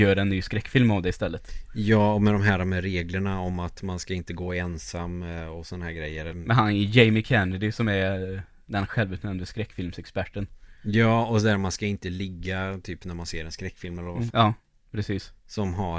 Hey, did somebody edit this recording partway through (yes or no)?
yes